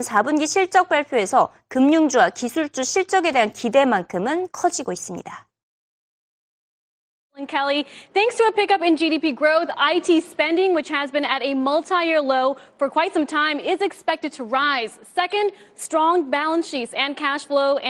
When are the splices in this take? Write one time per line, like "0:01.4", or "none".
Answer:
none